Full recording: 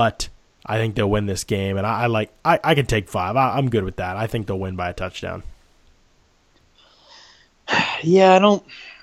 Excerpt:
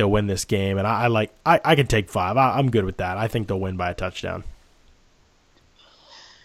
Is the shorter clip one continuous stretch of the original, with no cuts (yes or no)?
yes